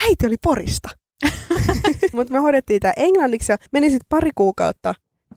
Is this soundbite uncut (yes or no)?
no